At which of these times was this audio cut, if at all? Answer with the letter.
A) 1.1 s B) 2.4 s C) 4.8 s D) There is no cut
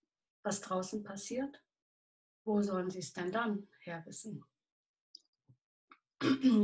B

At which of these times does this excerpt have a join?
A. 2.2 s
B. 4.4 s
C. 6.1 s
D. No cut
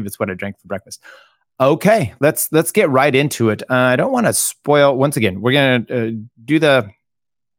D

